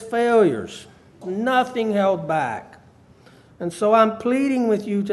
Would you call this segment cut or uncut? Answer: cut